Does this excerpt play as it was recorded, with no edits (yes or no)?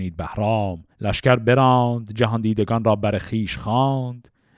no